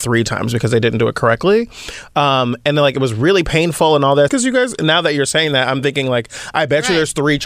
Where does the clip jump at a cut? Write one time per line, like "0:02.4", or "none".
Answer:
0:04.3